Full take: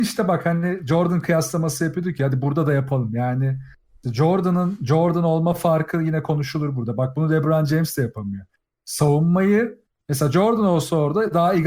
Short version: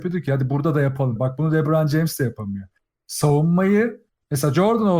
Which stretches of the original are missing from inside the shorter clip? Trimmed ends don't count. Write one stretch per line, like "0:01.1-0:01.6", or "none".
0:03.1-0:06.9